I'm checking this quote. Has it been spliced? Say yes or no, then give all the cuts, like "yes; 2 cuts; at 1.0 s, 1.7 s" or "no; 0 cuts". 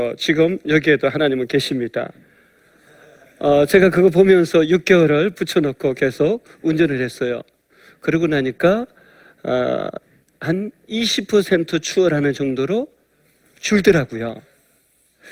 no; 0 cuts